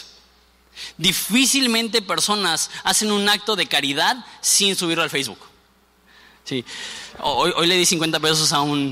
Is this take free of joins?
yes; 0 cuts

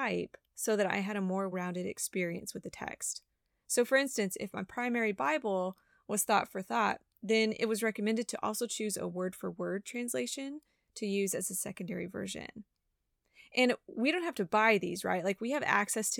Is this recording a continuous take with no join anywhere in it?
no; 1 cut; at 1.5 s

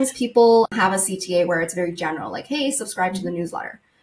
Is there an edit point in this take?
no; 0 cuts

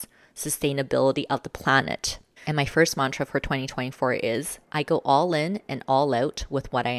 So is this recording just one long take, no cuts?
no; 2 cuts; at 2.4 s, 4.6 s

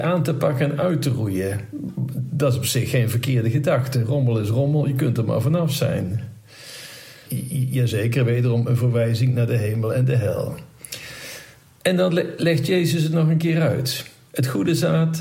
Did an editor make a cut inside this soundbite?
yes; 1 cut; at 7.3 s

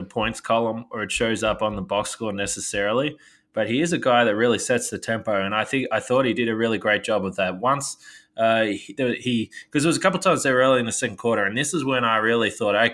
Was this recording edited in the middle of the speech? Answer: no; 0 cuts

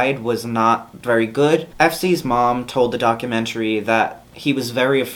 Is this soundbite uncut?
no; 1 cut; at 1.7 s

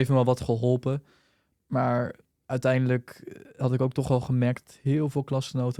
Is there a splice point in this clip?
no; 0 cuts

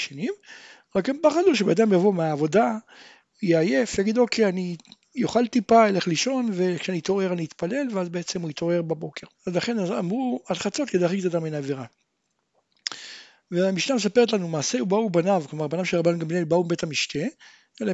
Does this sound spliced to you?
yes; 1 cut; at 9.3 s

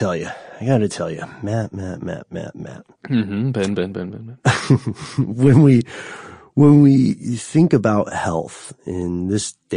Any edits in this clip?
no; 0 cuts

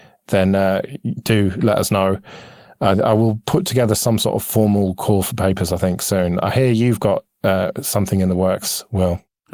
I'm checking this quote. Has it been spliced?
no; 0 cuts

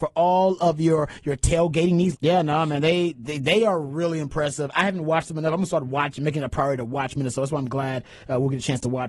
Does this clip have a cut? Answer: yes; 1 cut; at 2.1 s

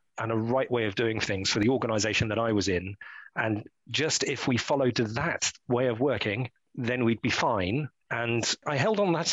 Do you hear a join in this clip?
no; 0 cuts

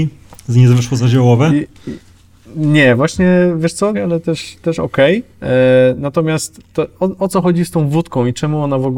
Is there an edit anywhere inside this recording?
yes; 2 cuts; at 3.9 s, 5.3 s

